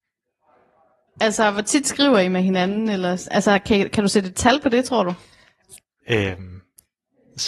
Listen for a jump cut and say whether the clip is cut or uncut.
cut